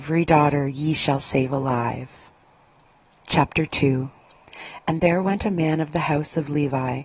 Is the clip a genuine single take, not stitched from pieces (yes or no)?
yes